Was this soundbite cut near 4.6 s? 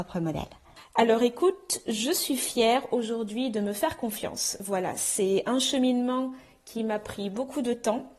no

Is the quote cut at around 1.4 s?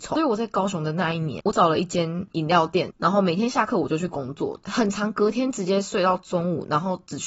no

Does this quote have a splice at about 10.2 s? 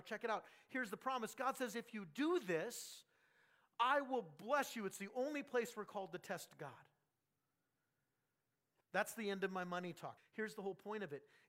yes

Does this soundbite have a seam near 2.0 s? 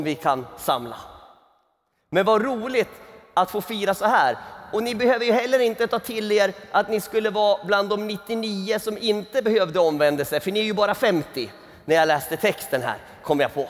no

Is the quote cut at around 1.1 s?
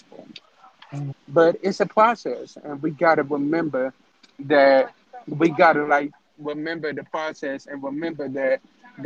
yes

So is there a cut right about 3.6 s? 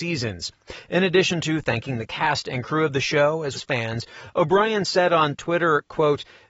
yes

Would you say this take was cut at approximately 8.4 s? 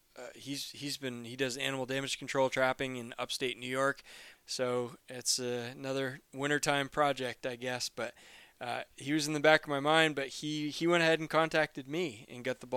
no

